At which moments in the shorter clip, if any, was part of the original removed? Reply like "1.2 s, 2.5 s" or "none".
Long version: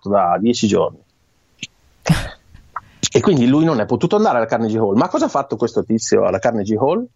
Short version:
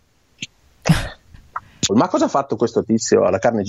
1.9 s